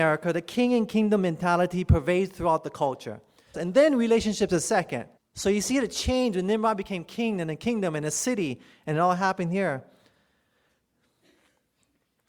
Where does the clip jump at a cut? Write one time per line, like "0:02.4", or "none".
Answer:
0:03.5
0:05.2